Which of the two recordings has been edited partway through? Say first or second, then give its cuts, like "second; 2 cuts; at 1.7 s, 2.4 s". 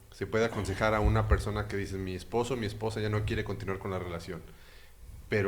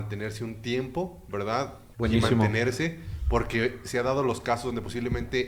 second; 1 cut; at 1.9 s